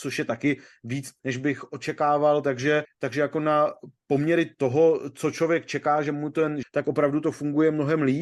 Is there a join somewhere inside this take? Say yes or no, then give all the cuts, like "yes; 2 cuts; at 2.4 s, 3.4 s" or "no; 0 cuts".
yes; 2 cuts; at 2.8 s, 6.6 s